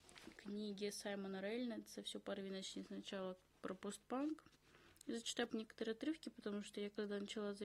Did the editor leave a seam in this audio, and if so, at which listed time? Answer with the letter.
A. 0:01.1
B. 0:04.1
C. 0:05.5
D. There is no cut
C